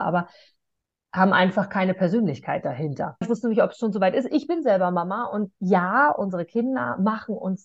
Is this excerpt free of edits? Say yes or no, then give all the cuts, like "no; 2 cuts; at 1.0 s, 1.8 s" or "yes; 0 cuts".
no; 1 cut; at 3.2 s